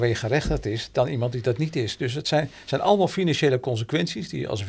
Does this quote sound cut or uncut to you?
uncut